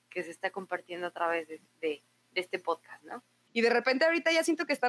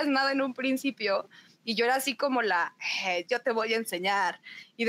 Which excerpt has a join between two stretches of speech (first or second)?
first